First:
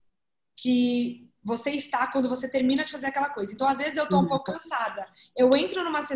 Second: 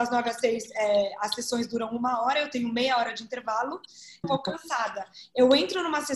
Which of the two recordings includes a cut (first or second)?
second